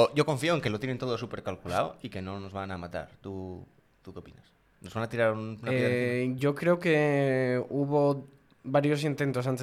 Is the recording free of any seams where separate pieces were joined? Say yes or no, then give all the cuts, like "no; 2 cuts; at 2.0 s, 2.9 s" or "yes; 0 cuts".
yes; 0 cuts